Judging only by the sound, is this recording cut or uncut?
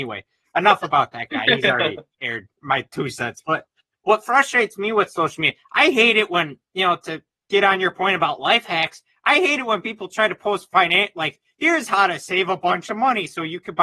uncut